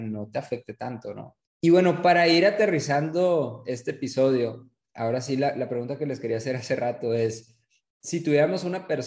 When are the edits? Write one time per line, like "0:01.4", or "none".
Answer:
0:01.4